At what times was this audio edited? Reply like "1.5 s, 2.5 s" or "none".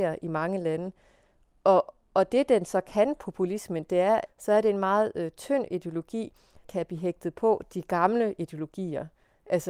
4.3 s, 6.6 s